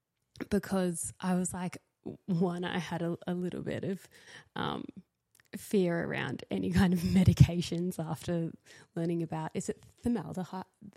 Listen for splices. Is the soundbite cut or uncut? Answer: uncut